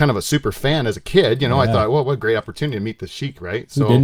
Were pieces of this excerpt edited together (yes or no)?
no